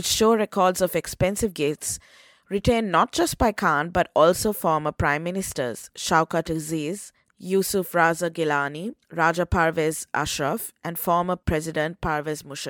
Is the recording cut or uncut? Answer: cut